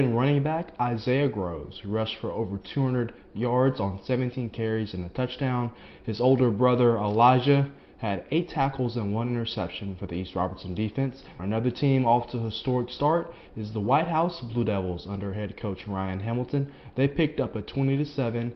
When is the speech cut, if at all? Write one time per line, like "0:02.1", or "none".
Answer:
0:11.4